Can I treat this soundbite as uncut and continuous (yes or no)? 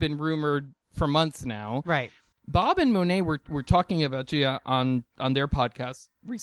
yes